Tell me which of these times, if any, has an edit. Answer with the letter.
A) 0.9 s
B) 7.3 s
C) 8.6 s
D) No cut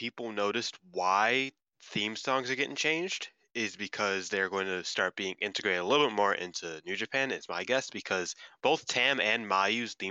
D